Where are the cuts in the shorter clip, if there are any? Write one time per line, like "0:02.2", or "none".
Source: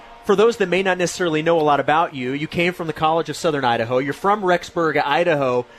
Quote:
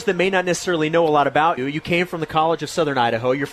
0:01.6